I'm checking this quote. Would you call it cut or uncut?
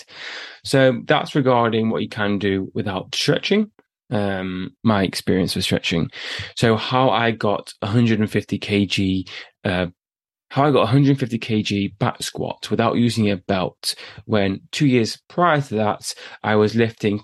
cut